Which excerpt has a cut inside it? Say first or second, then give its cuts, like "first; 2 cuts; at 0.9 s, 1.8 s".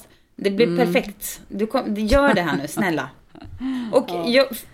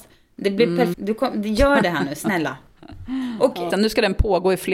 second; 2 cuts; at 0.9 s, 3.7 s